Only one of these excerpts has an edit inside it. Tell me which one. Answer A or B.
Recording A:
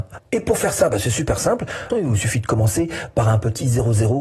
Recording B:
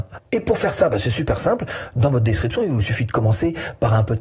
A